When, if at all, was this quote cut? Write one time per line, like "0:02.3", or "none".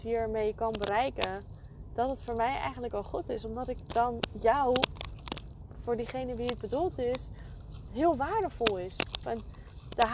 0:07.9
0:09.2